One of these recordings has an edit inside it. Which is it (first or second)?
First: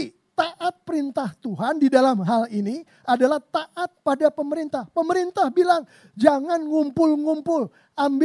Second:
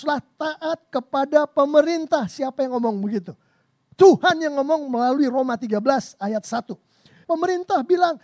second